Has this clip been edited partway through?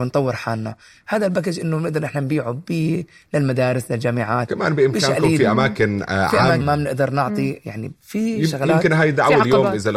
yes; 1 cut; at 6.6 s

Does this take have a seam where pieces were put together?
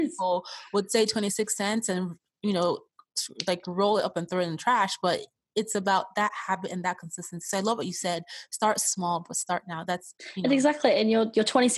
no; 0 cuts

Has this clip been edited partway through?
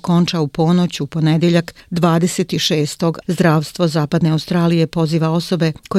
yes; 1 cut; at 3.2 s

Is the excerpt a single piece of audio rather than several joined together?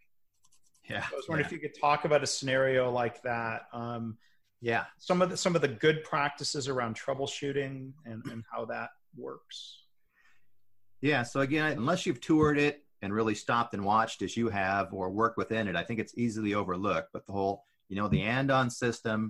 no; 1 cut; at 11.8 s

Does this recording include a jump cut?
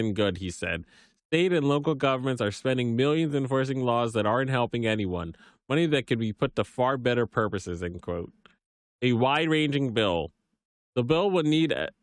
no; 0 cuts

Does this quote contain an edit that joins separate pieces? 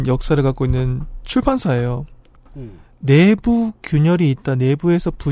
no; 0 cuts

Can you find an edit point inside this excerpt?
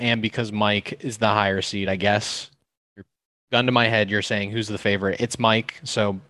no; 0 cuts

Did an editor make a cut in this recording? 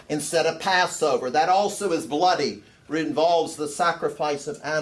no; 0 cuts

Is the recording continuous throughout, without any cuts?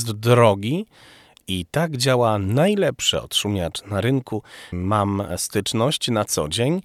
no; 2 cuts; at 1.3 s, 4.7 s

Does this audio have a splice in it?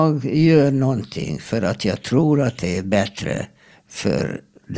no; 0 cuts

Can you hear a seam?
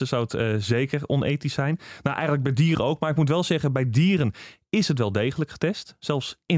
no; 0 cuts

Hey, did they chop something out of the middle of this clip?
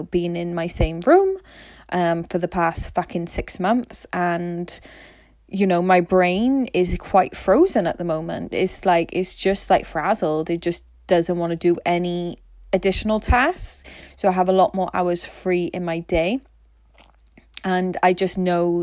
no; 0 cuts

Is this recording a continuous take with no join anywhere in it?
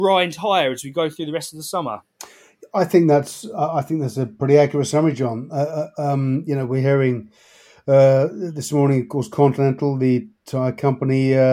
yes; 0 cuts

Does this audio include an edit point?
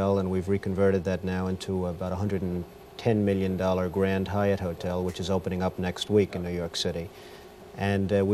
no; 0 cuts

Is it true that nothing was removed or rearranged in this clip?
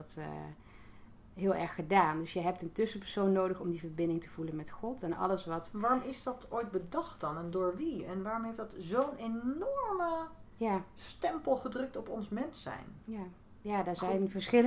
yes; 0 cuts

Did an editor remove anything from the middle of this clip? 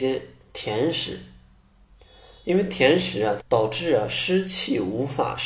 yes; 1 cut; at 3.4 s

